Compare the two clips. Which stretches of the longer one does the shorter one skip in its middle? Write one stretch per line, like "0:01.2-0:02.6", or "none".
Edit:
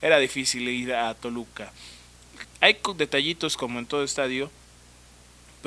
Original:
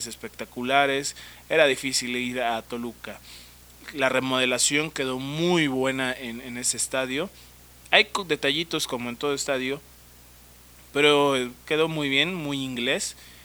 0:03.9-0:07.7